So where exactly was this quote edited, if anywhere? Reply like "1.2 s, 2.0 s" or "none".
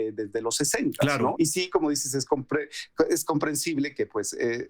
1.3 s